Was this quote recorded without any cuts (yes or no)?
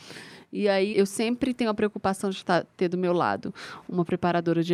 no